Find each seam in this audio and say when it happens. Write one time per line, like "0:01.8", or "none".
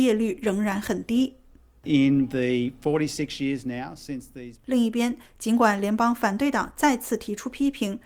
0:04.6